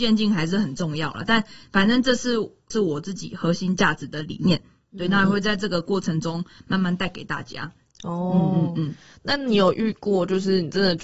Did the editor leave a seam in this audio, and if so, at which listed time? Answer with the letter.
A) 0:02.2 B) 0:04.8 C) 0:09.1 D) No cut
D